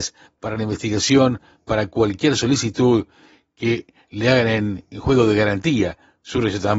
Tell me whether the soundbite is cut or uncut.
cut